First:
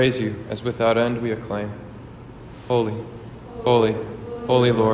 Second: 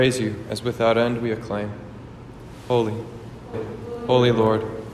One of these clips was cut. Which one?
second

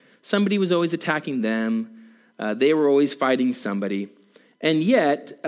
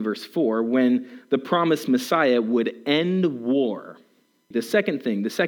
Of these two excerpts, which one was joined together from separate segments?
second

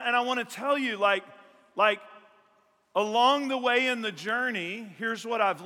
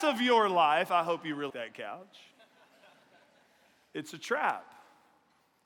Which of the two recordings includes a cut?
second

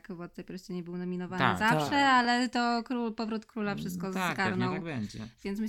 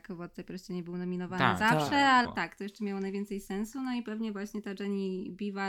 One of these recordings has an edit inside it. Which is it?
second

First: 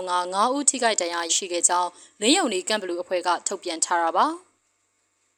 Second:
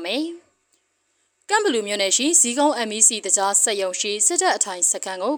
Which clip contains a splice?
first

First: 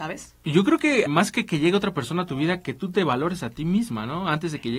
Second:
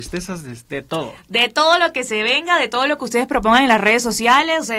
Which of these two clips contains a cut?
first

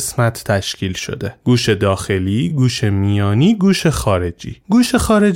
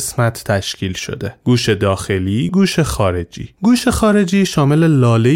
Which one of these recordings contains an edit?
second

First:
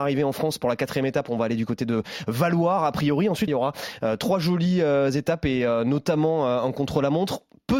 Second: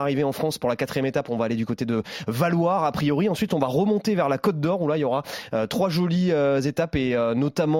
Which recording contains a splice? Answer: first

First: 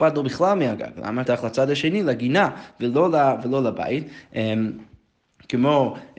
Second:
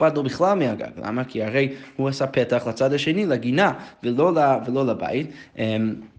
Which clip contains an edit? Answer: first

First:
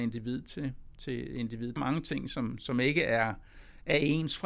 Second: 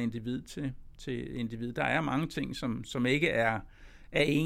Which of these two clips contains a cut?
first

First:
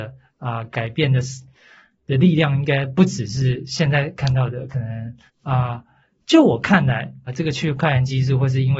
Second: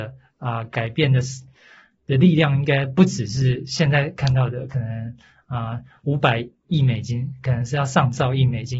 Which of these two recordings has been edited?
first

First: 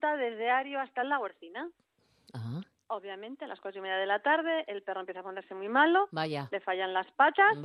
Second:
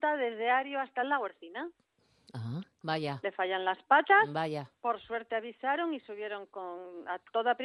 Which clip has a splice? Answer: second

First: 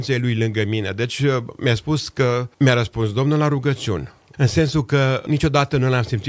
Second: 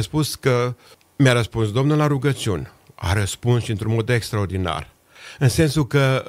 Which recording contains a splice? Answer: first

